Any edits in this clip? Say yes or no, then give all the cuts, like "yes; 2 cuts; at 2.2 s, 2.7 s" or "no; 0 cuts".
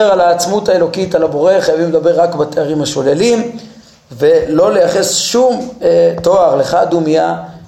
no; 0 cuts